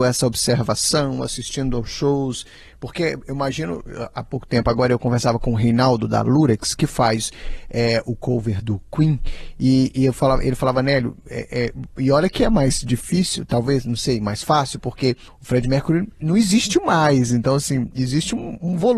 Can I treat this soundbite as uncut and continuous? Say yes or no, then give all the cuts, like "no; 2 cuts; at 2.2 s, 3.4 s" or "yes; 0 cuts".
yes; 0 cuts